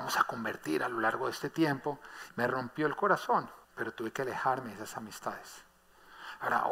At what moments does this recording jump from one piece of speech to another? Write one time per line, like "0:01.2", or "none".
0:02.3
0:03.6